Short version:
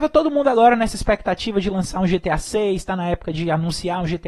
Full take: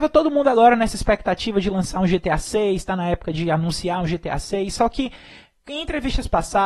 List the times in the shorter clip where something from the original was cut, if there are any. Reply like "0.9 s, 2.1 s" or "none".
none